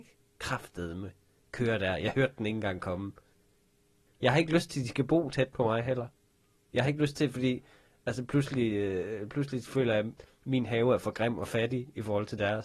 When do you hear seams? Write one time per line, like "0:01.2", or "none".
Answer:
0:04.1